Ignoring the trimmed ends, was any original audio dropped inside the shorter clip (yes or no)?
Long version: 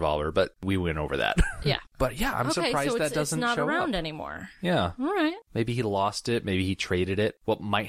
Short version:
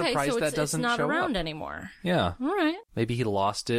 no